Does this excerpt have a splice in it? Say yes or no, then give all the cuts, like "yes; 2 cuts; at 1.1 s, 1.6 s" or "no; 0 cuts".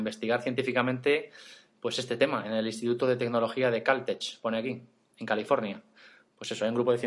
no; 0 cuts